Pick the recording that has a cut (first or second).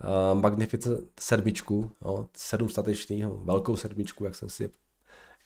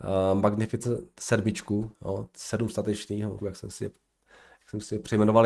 second